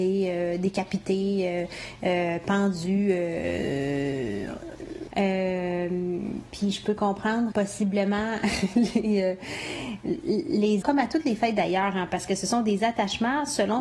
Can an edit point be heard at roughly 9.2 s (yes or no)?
no